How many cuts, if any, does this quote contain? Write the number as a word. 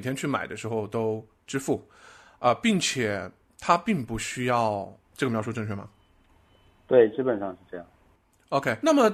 one